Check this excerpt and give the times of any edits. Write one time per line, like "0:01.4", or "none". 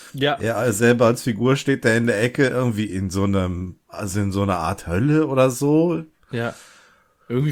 none